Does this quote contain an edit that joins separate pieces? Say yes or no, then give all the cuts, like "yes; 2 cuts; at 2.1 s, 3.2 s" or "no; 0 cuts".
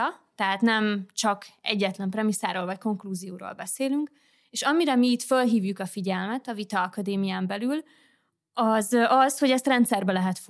no; 0 cuts